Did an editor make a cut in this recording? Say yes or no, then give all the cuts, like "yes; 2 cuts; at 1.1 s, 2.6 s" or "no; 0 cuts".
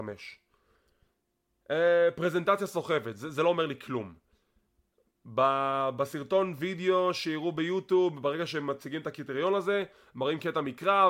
no; 0 cuts